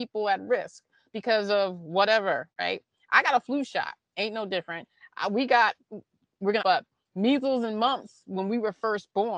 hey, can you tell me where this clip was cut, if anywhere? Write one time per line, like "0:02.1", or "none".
0:02.5
0:06.6